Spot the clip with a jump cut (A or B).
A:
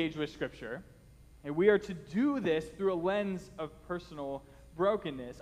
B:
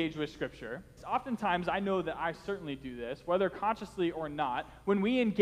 B